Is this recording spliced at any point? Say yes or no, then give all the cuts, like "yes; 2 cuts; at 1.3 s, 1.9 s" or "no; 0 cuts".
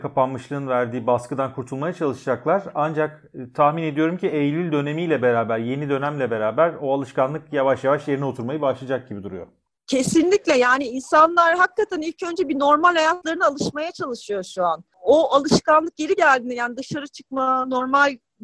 no; 0 cuts